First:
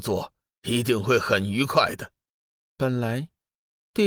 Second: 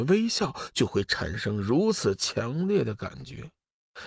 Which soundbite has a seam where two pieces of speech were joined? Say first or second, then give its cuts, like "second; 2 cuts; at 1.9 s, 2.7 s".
first; 1 cut; at 2.6 s